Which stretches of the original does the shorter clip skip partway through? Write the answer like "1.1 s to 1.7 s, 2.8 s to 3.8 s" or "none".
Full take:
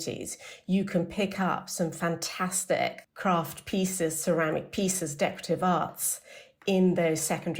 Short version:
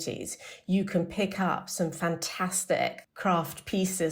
none